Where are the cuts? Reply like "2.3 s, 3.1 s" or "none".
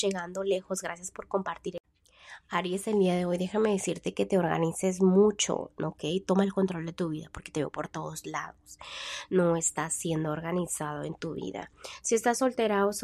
none